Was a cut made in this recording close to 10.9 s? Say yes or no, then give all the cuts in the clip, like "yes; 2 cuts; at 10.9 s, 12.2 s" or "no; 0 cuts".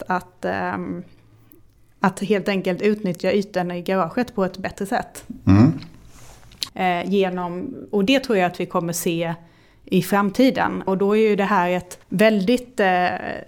yes; 3 cuts; at 6.7 s, 10.9 s, 12.0 s